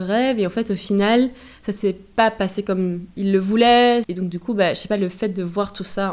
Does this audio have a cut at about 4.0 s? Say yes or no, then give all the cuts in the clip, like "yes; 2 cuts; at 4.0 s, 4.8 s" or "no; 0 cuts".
yes; 1 cut; at 4.0 s